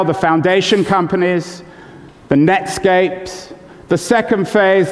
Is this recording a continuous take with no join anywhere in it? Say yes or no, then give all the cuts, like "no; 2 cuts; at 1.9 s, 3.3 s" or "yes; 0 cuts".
yes; 0 cuts